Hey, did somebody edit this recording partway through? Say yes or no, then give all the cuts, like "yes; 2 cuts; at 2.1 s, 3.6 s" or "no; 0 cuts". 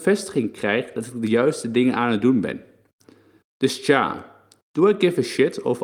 no; 0 cuts